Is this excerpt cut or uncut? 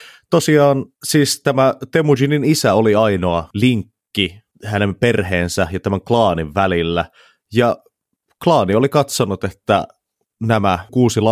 cut